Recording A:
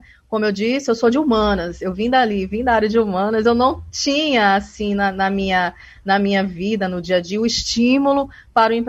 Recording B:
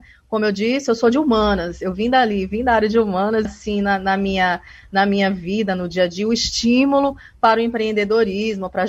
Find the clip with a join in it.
B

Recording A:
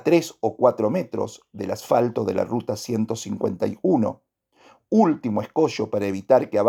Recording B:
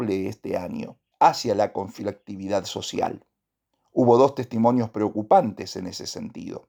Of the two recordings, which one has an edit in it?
B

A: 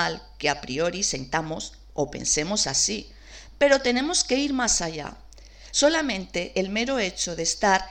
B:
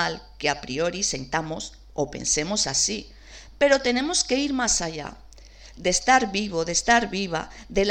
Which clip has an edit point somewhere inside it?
B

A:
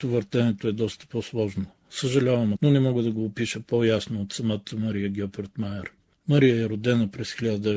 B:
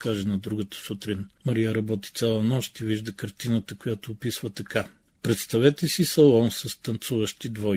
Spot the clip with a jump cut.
A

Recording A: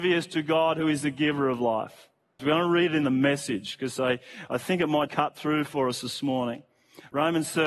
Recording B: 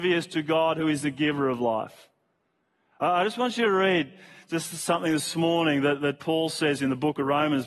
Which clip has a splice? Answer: A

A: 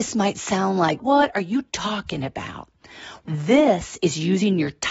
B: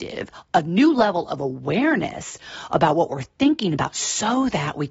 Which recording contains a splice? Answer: A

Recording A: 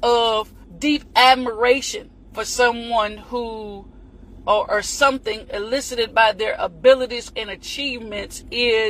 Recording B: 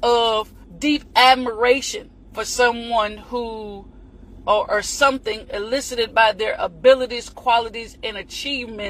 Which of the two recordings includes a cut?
A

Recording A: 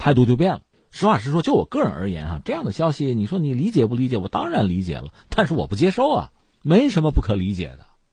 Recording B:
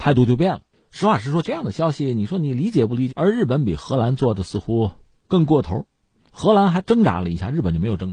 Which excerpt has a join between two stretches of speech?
B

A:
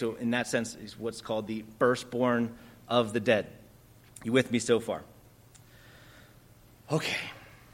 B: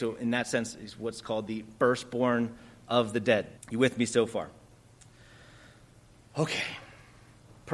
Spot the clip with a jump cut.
B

